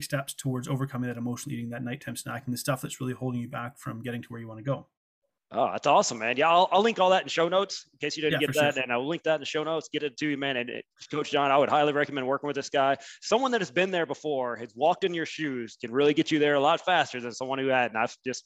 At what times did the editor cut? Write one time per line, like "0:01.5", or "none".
none